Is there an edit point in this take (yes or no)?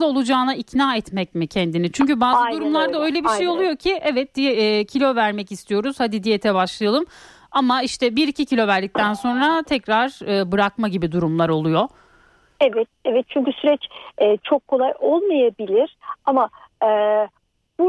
no